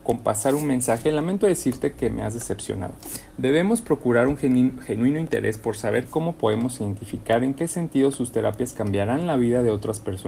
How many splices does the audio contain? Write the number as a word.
zero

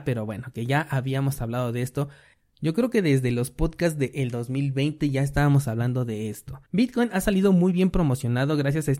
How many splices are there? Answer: one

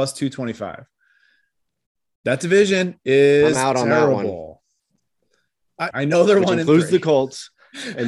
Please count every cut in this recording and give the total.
one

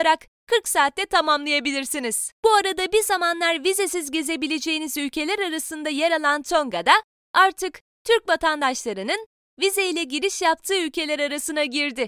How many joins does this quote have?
one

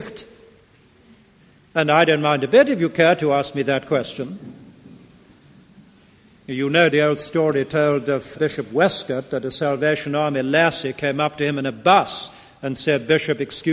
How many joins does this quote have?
two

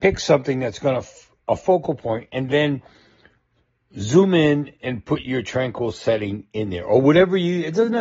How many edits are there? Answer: zero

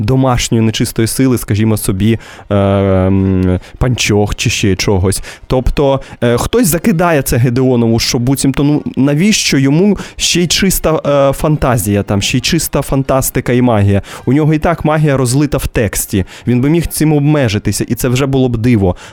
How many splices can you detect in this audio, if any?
zero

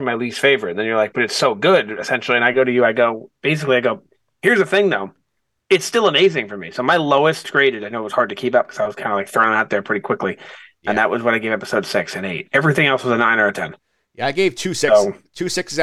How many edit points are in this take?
one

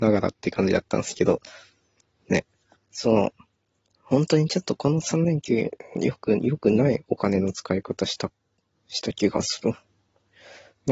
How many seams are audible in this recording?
one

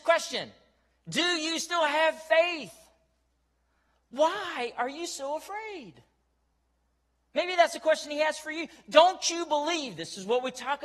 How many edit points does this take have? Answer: zero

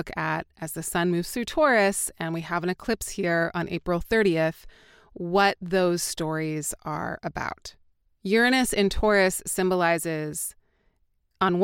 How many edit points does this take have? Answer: one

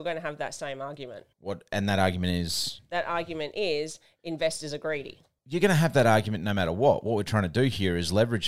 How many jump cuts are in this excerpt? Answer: one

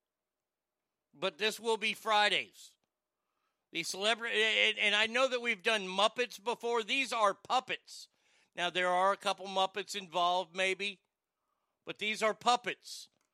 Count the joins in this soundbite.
zero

